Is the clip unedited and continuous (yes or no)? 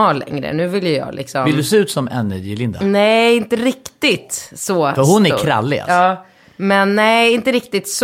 yes